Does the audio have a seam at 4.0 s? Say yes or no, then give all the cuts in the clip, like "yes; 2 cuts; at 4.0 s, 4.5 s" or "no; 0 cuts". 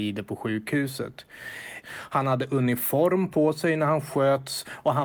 no; 1 cut; at 1.8 s